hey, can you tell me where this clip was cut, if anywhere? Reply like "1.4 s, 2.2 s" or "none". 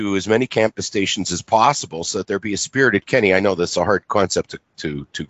none